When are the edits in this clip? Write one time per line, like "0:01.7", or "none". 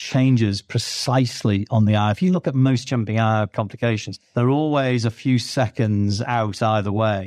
none